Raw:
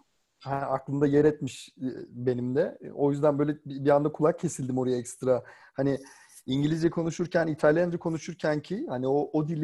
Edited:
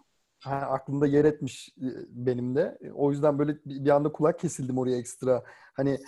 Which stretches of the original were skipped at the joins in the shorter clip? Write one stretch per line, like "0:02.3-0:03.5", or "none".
none